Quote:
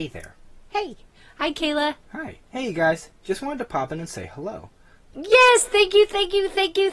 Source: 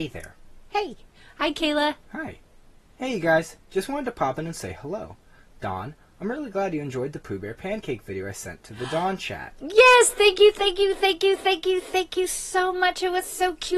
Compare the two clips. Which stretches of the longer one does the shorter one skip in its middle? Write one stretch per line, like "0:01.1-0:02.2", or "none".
0:02.5-0:02.9
0:05.6-0:09.6